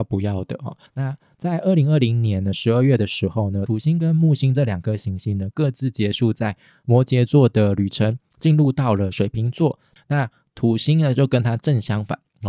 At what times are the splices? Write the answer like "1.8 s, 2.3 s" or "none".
10.0 s